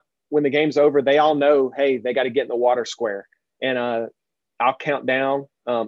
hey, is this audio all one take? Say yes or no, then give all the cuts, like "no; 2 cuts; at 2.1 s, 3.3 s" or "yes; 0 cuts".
yes; 0 cuts